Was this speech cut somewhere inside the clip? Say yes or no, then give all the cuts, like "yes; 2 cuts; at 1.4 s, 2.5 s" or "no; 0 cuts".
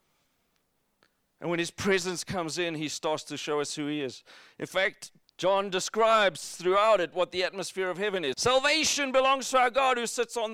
yes; 2 cuts; at 5.2 s, 8.3 s